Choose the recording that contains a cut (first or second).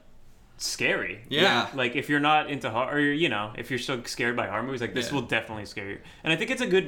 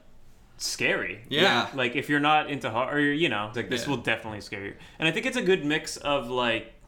second